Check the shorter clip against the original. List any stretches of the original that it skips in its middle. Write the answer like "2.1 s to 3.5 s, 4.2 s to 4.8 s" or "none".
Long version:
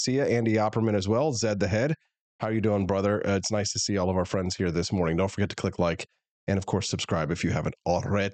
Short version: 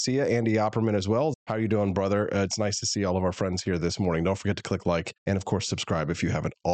1.3 s to 2.3 s, 6.1 s to 6.4 s

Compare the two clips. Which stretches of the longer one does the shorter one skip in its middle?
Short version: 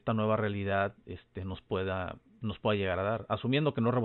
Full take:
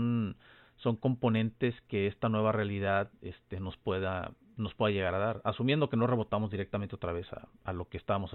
none

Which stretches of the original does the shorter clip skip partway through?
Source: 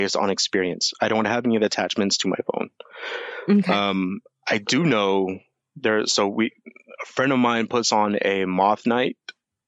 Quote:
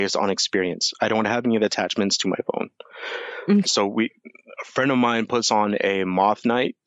3.6 s to 6.1 s

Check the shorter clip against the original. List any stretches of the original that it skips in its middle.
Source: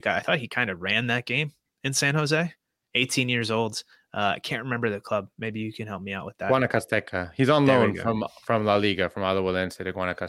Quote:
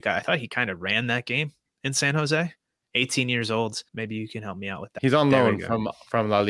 3.9 s to 5.3 s, 6.4 s to 7.3 s

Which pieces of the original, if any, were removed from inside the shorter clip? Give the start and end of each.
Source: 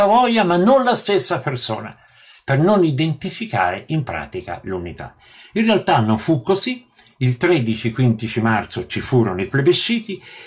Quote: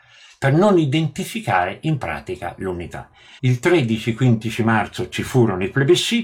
5.4 s to 7.2 s

